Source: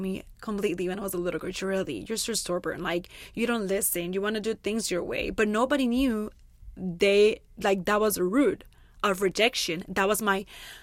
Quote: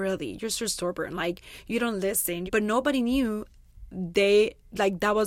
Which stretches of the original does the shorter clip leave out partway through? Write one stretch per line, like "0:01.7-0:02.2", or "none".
0:04.1-0:05.3